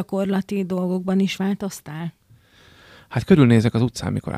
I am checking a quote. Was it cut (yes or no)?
no